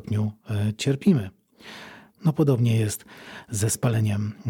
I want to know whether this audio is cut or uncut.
cut